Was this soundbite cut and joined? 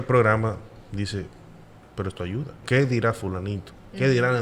yes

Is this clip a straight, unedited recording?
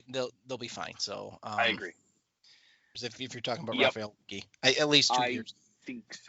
no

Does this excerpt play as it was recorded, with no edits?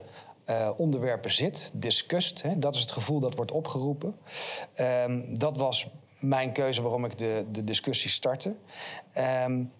yes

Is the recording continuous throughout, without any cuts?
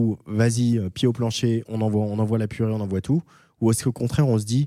yes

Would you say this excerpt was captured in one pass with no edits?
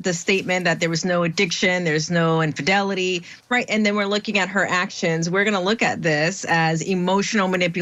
yes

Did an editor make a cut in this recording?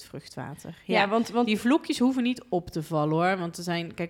no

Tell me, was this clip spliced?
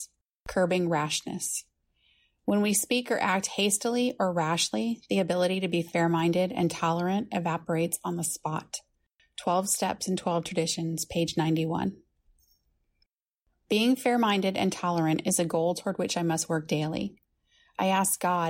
no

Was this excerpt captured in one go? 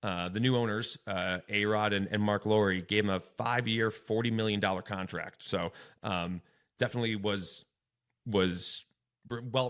yes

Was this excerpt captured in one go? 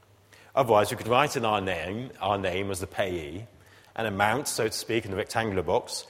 no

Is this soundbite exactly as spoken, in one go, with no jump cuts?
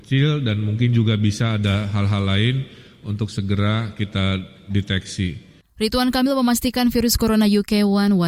no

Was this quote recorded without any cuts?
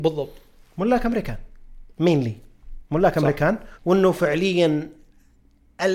no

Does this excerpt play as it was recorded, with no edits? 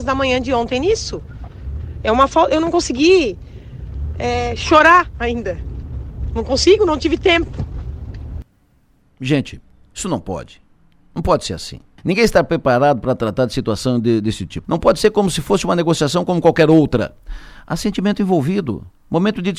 no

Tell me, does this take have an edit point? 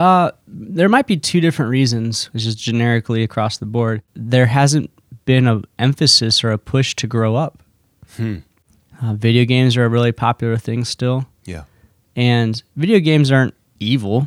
yes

